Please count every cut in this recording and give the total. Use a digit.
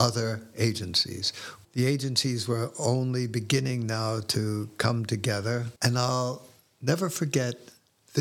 2